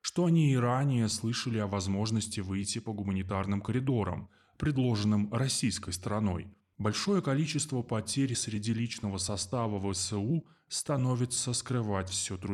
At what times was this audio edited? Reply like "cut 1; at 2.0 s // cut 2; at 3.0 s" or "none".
cut 1; at 6.7 s